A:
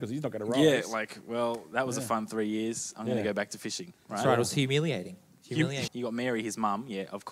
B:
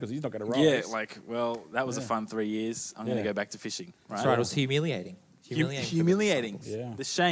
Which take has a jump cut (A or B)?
A